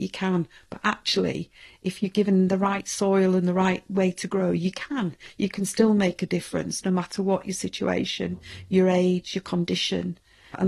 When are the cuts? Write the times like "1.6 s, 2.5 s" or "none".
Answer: none